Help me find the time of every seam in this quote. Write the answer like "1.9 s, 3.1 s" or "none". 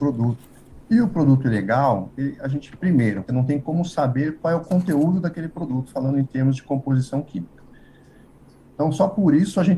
3.3 s